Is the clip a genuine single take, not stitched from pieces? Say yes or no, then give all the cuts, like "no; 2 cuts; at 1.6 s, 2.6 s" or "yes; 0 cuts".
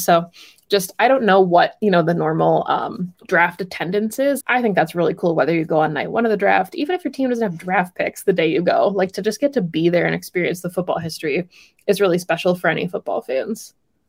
no; 2 cuts; at 3.2 s, 4.4 s